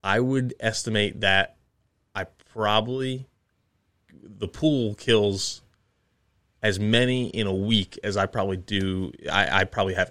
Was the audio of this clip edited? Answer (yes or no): no